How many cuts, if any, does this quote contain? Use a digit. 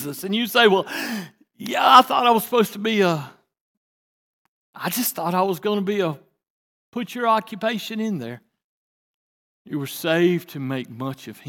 1